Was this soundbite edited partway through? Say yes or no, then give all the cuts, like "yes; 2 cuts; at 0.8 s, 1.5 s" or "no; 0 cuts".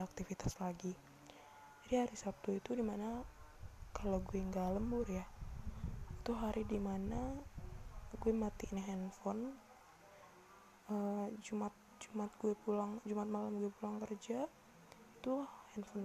no; 0 cuts